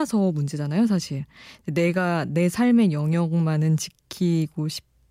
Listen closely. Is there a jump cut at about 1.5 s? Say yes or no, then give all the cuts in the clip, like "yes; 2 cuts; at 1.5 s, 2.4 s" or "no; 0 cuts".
no; 0 cuts